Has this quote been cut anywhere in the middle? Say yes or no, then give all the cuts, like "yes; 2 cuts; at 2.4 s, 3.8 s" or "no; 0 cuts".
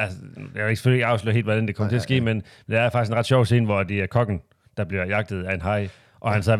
no; 0 cuts